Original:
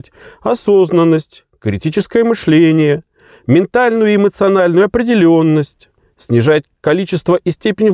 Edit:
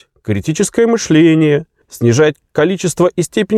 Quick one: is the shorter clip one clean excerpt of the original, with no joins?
no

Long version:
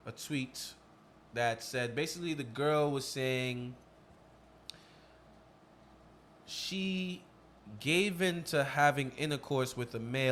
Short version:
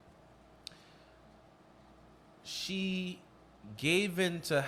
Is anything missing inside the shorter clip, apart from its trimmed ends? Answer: no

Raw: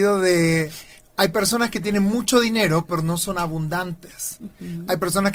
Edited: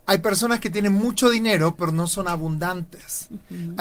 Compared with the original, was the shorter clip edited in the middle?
no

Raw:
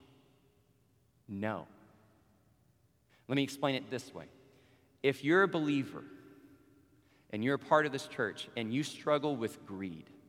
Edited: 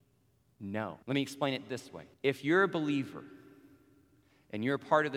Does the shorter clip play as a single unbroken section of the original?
no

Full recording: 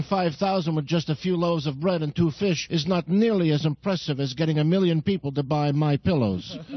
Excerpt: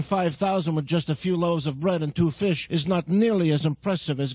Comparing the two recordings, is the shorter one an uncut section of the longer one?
yes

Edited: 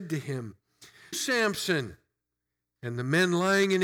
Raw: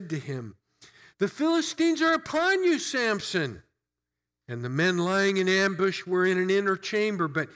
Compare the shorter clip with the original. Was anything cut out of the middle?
yes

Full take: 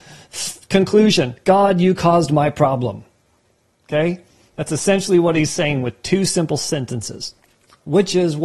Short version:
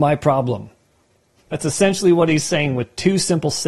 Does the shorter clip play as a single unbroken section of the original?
no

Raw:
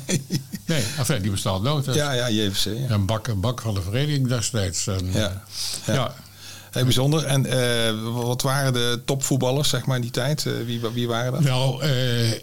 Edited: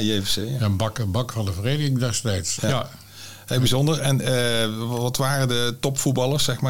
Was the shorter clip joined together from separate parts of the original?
yes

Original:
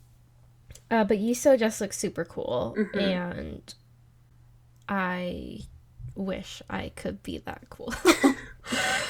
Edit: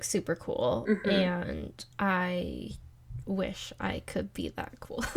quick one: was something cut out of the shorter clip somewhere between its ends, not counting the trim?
yes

